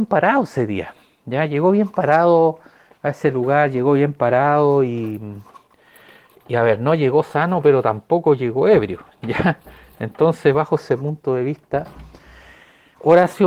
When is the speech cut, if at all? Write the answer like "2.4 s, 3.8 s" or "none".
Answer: none